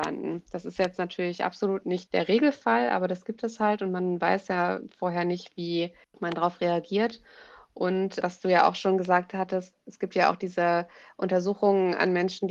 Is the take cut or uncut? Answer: uncut